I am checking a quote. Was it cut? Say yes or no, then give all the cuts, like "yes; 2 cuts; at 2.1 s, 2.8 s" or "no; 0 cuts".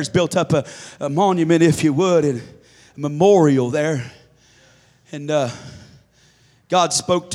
no; 0 cuts